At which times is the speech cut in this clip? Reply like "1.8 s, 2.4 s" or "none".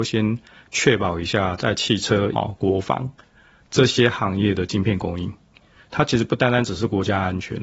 2.3 s